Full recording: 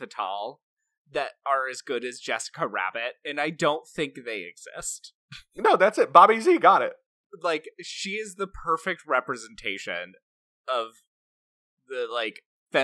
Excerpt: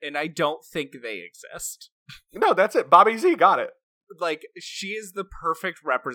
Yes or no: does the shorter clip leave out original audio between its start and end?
no